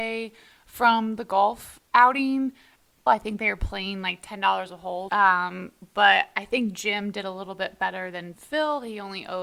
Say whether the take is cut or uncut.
cut